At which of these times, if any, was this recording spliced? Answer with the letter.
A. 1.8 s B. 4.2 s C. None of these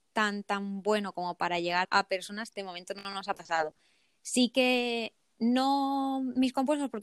A